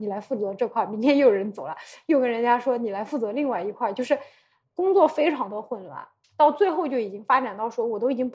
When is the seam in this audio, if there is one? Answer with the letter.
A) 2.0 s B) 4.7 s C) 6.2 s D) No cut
D